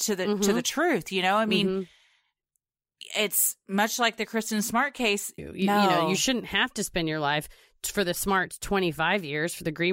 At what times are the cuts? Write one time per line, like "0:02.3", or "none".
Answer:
0:05.4